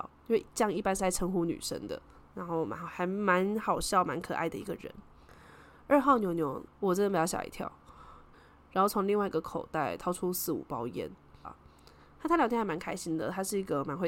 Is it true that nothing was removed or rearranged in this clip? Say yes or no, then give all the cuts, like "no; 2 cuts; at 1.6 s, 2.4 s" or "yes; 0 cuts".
no; 3 cuts; at 6.7 s, 8.3 s, 11.4 s